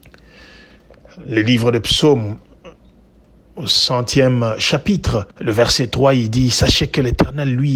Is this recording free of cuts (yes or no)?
no